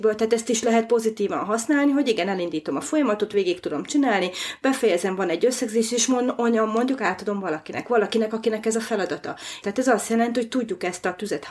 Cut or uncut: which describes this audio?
cut